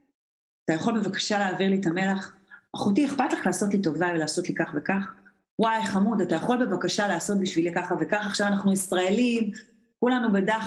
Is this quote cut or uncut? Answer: uncut